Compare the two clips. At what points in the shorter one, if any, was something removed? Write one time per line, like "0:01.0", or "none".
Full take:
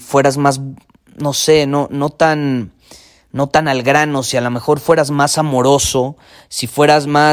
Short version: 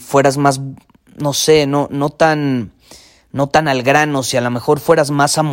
none